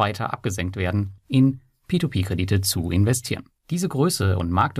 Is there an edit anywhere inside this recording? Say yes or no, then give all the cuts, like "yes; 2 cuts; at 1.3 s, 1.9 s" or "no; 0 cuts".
yes; 2 cuts; at 1.2 s, 3.6 s